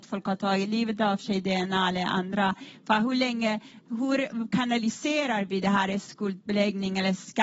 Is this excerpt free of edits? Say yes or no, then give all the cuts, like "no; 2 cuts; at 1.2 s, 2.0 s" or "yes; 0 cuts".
yes; 0 cuts